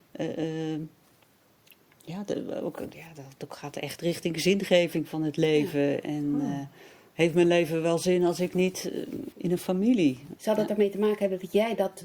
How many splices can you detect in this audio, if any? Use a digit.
2